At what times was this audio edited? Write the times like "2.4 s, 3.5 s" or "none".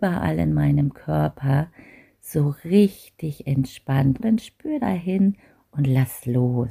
4.2 s

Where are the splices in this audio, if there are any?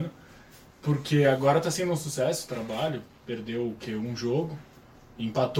none

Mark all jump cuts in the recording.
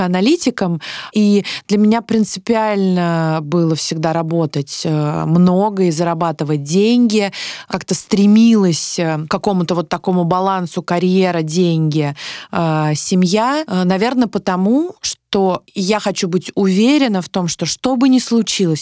1.1 s

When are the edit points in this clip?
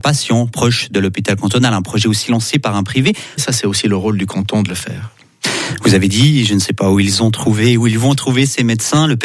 3.4 s

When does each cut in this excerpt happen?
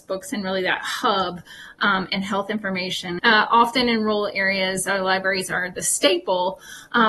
3.2 s

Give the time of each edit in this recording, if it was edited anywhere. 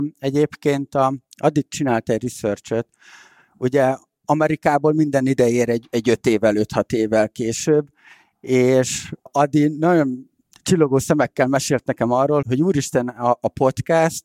12.4 s

